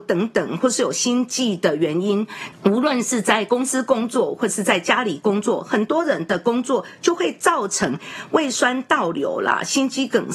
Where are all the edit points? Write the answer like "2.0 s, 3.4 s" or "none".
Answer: 2.5 s